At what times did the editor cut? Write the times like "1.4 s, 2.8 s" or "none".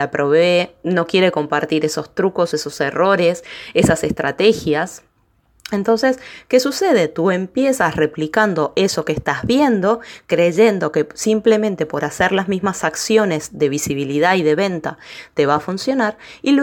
2.5 s